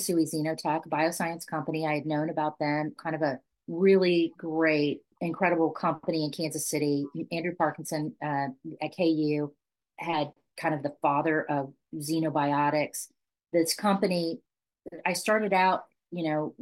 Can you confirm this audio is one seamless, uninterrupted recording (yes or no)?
yes